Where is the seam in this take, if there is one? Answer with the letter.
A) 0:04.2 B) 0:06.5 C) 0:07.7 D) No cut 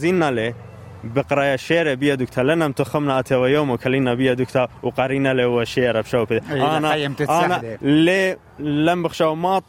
D